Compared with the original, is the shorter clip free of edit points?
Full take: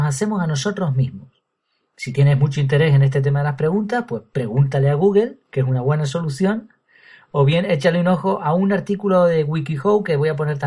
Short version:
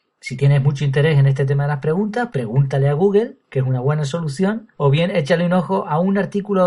no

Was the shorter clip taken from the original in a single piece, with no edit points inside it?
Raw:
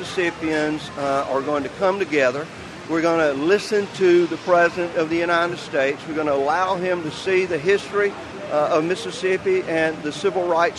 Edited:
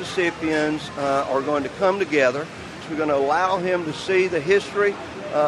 no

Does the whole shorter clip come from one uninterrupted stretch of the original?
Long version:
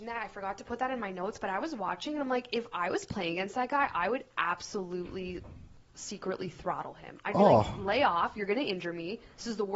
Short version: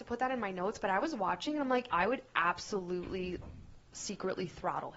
no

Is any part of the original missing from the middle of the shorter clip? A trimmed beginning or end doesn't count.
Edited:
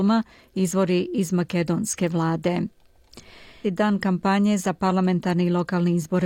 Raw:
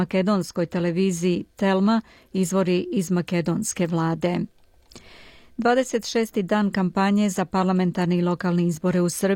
yes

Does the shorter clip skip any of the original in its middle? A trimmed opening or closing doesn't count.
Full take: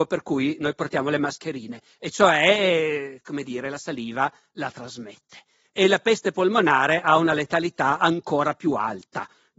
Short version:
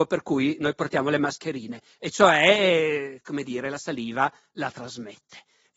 no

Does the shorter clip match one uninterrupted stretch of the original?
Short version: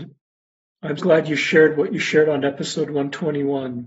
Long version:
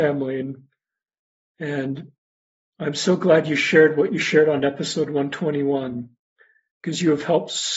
no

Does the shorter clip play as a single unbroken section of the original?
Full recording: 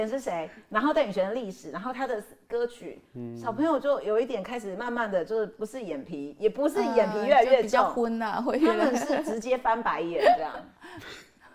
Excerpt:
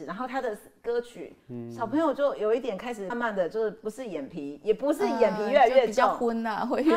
no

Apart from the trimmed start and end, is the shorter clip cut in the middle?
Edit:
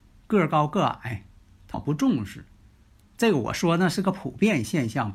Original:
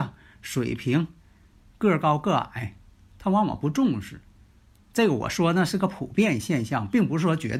yes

